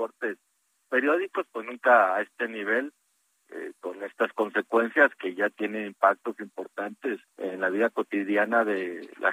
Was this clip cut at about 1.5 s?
no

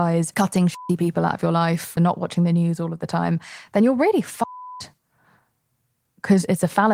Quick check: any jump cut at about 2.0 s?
yes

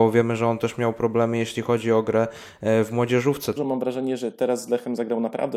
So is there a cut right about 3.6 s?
yes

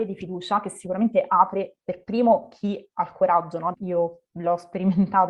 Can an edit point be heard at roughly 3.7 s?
yes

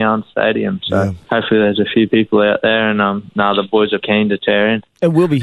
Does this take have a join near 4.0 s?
yes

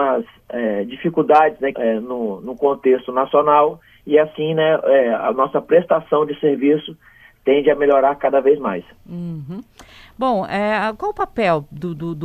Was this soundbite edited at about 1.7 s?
yes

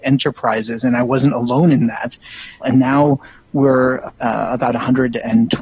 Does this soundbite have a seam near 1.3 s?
no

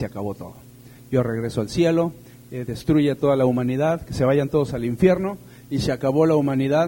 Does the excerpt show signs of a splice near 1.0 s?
no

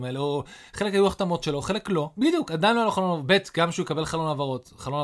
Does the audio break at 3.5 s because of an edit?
no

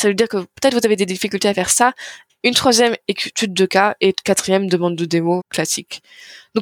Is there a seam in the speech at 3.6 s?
no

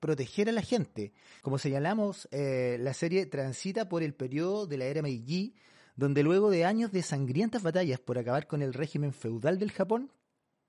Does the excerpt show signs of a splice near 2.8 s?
no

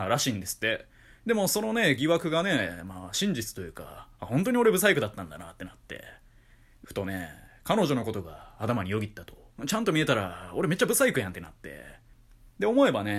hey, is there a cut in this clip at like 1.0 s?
no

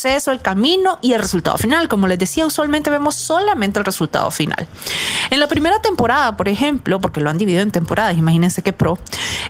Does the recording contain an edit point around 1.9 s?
no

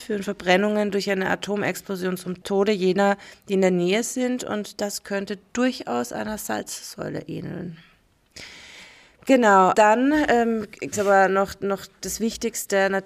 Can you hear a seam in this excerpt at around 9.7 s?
yes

